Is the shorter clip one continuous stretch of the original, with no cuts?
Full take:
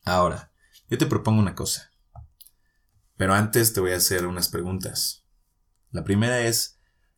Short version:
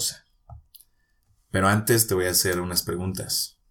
yes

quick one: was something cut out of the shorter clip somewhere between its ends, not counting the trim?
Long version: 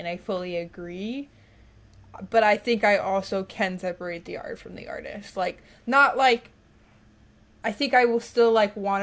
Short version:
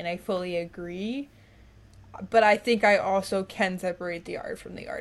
no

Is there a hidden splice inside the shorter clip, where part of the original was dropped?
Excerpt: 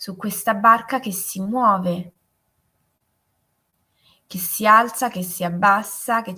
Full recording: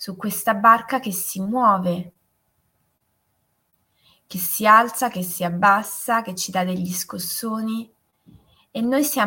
no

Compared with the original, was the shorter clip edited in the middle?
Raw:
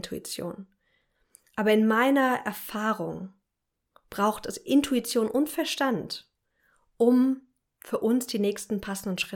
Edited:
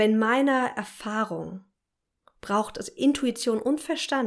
no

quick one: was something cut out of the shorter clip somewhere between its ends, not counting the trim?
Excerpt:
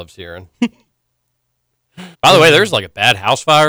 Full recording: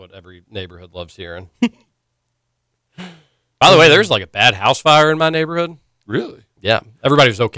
yes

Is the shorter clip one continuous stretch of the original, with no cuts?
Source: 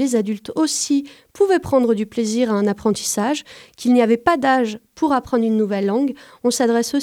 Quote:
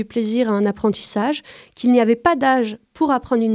yes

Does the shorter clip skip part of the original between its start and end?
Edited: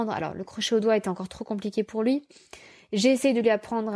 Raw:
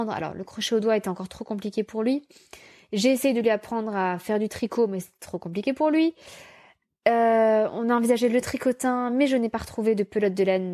no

